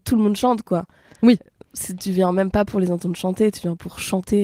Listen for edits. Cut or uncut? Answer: uncut